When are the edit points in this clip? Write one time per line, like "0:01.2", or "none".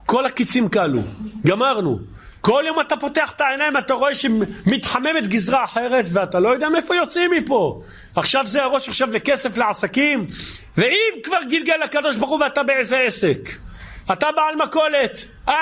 none